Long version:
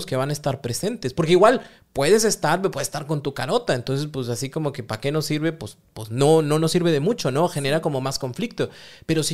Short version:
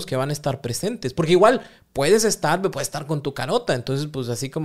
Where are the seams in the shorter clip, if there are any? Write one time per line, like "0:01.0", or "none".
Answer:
none